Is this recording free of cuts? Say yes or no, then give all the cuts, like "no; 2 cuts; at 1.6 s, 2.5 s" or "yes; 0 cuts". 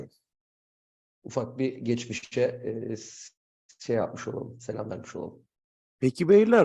no; 1 cut; at 1.2 s